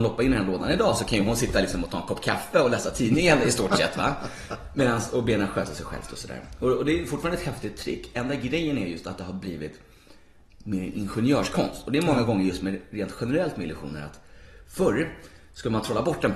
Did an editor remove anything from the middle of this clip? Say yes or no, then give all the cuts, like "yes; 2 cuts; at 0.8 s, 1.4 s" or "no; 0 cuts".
no; 0 cuts